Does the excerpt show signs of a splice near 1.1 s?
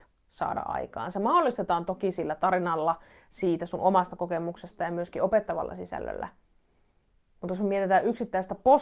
no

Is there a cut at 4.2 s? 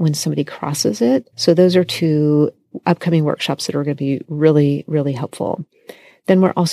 no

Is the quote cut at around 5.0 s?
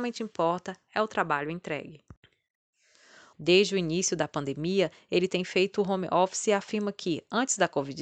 no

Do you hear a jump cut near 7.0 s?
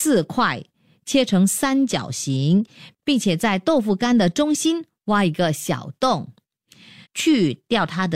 yes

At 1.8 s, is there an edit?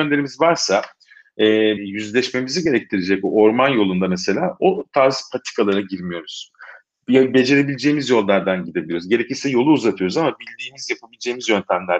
yes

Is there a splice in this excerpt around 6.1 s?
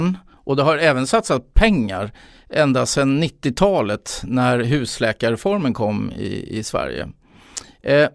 no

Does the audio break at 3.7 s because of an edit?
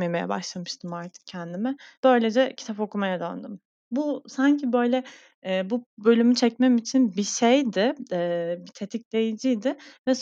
no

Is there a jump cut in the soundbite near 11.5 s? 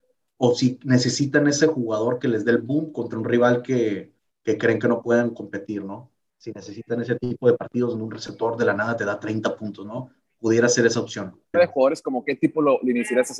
yes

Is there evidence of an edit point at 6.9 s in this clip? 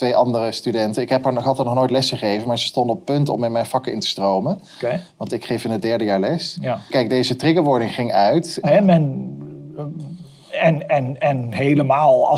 yes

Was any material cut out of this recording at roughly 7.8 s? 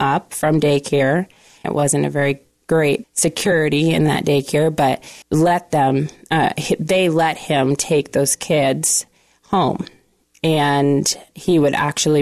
no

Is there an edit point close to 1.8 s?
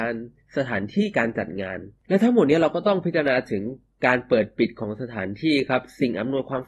no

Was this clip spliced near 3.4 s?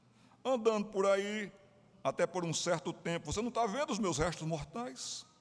no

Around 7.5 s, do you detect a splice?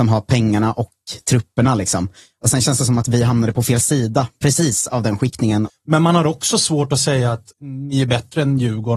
yes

